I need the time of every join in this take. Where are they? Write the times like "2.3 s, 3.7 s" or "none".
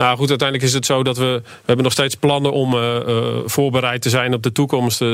none